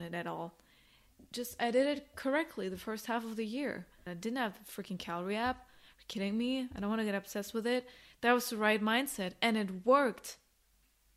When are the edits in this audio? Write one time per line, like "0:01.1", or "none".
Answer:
0:04.1